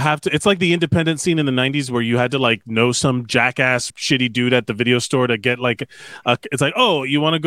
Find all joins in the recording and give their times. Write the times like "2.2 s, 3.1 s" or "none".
3.9 s